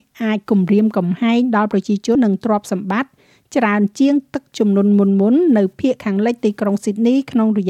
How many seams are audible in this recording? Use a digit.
1